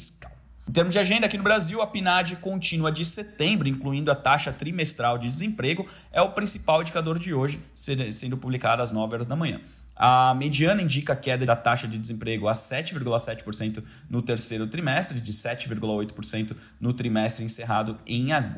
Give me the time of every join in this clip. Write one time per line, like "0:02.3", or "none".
none